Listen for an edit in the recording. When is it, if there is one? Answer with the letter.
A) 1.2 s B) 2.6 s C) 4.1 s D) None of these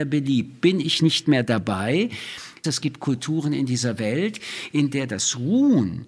B